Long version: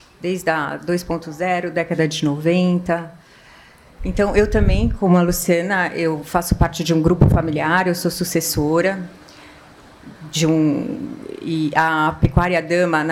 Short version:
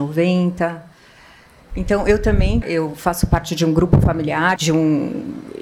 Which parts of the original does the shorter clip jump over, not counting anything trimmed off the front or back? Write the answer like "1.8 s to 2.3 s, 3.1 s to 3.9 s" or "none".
4.9 s to 5.9 s, 7.8 s to 10.3 s